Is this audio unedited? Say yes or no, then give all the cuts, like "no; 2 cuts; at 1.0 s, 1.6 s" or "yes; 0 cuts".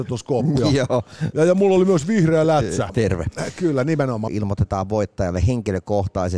no; 2 cuts; at 2.9 s, 4.3 s